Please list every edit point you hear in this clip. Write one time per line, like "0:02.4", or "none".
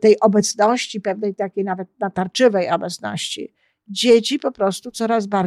none

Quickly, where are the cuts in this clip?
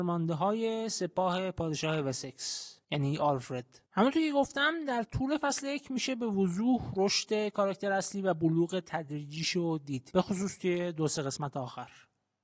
0:03.9

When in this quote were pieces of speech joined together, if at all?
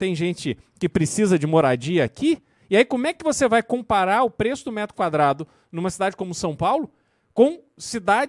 none

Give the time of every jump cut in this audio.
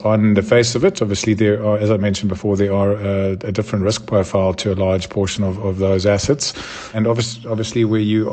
0:06.9

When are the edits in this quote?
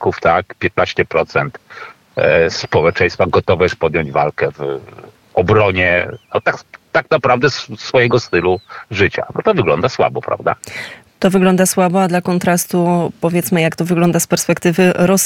none

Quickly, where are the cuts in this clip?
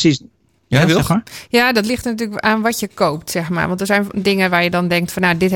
none

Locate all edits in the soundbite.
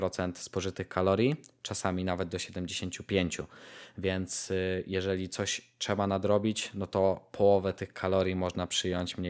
none

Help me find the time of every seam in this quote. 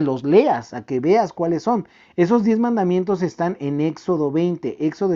none

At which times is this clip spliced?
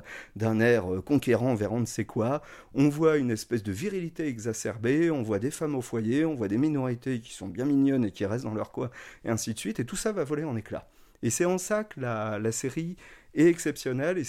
none

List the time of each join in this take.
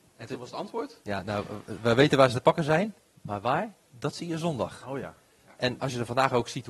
0:05.6

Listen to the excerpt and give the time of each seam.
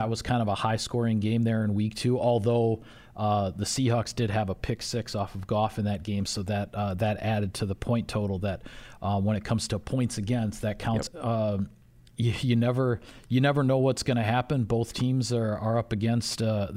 0:11.1

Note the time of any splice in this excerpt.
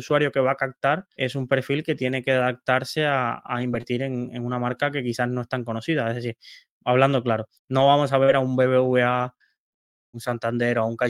none

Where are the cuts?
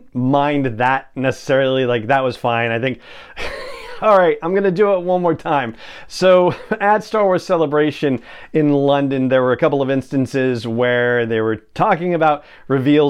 none

